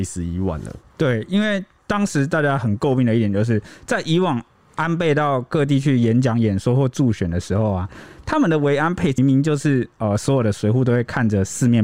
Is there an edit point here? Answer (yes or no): yes